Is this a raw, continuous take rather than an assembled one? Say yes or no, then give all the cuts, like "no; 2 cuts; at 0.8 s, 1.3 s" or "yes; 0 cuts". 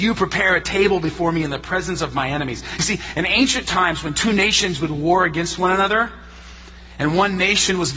yes; 0 cuts